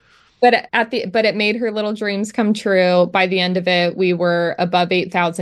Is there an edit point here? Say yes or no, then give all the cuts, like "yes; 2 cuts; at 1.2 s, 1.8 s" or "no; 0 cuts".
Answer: no; 0 cuts